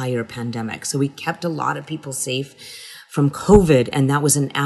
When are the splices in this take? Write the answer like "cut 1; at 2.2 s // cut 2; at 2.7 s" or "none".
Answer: none